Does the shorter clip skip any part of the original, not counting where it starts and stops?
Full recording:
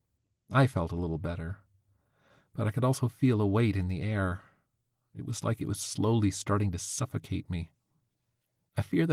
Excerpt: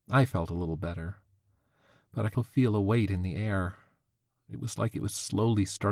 yes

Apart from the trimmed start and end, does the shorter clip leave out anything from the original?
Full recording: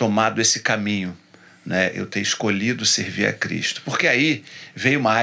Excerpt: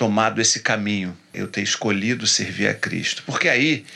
yes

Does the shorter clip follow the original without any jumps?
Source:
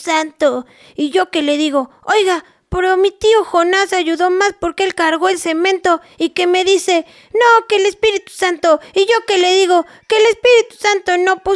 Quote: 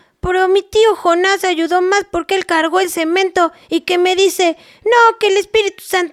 yes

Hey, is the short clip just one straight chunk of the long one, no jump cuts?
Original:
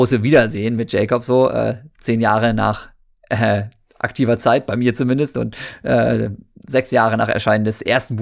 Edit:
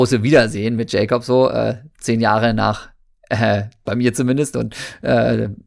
no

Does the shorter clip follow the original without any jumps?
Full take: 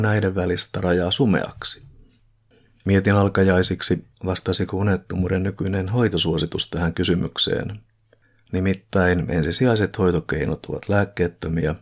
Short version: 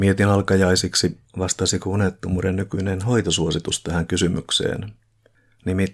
yes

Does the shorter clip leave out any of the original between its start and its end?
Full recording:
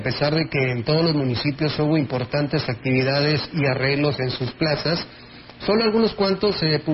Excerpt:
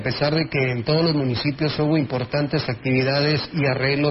no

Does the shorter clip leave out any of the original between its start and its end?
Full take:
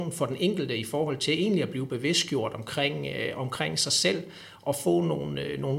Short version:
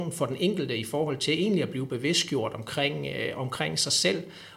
no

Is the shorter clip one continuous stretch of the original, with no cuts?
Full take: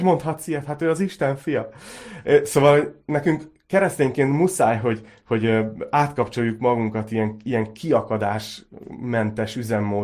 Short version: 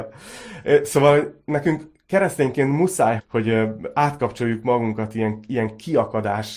no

